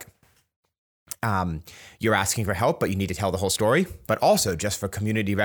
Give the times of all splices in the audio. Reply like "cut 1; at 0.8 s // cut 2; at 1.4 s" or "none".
cut 1; at 4.0 s